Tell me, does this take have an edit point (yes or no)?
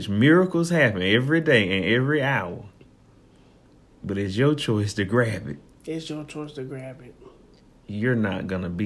yes